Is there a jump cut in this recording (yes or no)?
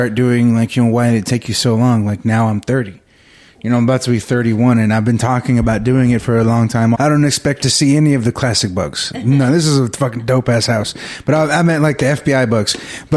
yes